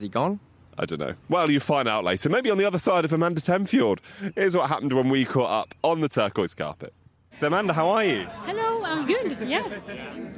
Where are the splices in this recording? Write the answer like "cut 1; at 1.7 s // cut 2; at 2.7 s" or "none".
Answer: cut 1; at 1.2 s // cut 2; at 9.0 s